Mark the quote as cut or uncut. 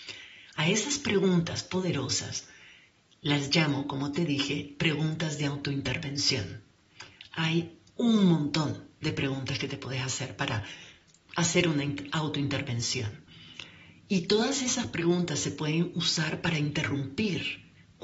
uncut